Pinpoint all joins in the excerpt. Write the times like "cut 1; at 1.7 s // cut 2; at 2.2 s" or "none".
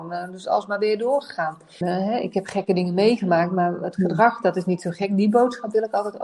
cut 1; at 1.8 s